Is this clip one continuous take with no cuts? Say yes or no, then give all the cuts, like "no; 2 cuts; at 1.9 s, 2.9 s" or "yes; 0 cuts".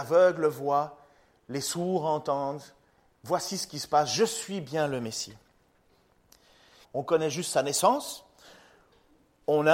no; 1 cut; at 6.8 s